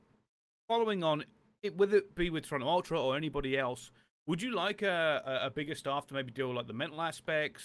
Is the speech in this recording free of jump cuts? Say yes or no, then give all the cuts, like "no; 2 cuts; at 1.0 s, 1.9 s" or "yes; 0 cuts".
yes; 0 cuts